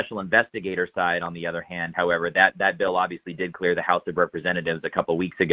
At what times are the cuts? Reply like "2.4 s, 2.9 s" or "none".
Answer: none